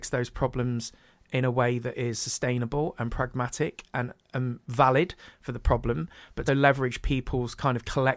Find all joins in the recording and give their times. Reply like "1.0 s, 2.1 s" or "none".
4.2 s, 6.5 s